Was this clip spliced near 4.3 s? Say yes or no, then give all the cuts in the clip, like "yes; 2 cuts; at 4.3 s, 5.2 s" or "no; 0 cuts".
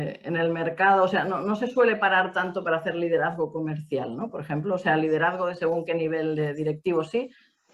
no; 0 cuts